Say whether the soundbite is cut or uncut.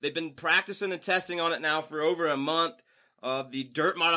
uncut